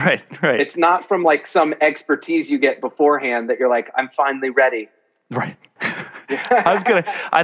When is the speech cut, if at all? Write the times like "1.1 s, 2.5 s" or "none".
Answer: 5.8 s